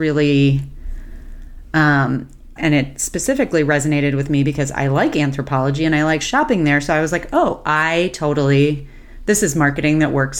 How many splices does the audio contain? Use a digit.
1